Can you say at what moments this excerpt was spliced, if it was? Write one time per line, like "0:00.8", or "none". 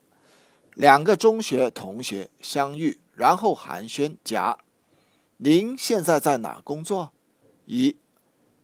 0:04.2
0:07.2